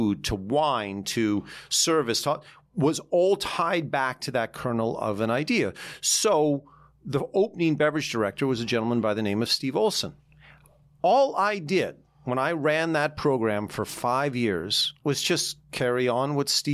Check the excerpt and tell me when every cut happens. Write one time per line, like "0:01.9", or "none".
none

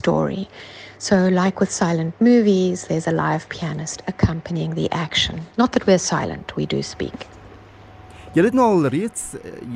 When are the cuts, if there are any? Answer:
0:05.5

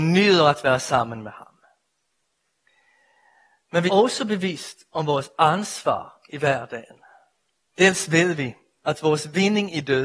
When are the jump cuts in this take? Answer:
0:03.9
0:07.7

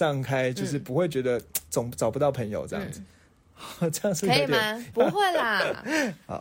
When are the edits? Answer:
0:01.7
0:04.9

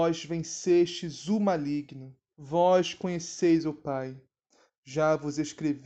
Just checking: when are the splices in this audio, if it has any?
0:02.3

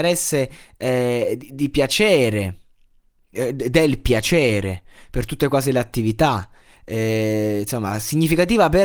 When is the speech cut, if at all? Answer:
none

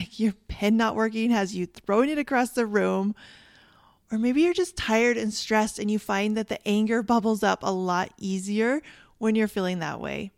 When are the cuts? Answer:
0:04.0

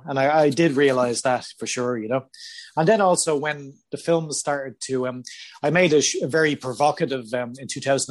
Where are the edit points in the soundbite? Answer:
none

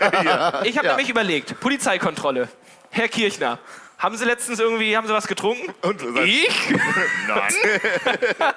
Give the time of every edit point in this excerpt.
0:07.5

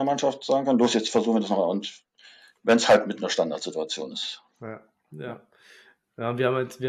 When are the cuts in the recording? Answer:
none

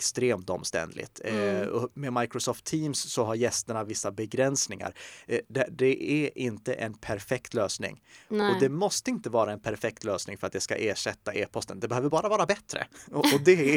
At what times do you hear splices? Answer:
none

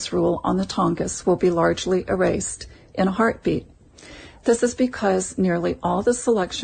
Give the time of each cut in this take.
none

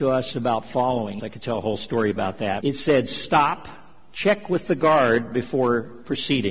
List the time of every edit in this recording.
0:01.2
0:02.6

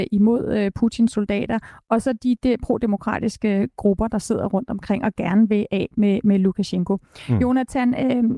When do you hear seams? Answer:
none

